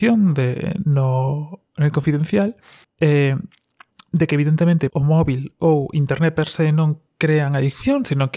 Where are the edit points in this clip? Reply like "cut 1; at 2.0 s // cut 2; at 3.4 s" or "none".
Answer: cut 1; at 2.8 s // cut 2; at 4.9 s